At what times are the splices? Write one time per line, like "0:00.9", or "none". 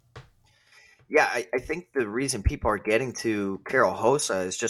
none